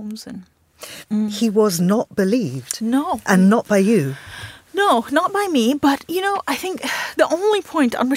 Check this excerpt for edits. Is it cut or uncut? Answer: cut